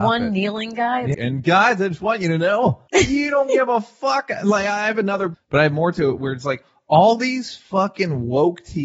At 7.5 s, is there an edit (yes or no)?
no